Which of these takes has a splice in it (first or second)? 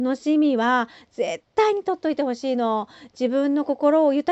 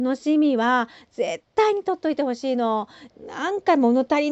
second